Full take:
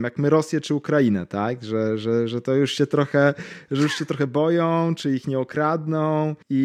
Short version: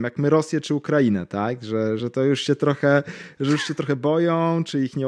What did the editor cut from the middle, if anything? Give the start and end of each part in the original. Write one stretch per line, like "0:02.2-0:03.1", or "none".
0:02.0-0:02.3